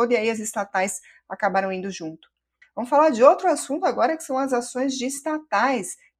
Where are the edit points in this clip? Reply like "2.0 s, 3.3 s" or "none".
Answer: 2.6 s